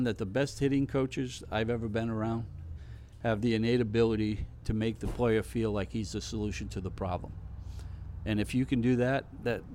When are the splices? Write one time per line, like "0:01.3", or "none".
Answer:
none